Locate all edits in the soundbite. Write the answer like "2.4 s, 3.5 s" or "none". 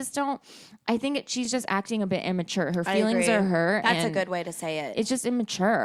none